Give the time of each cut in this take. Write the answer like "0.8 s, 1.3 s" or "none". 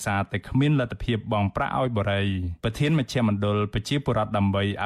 2.6 s